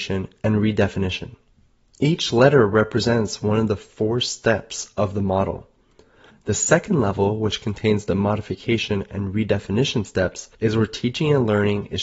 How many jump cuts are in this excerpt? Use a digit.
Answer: 2